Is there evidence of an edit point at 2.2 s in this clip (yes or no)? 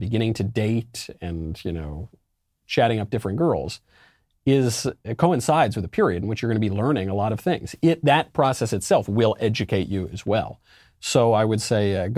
no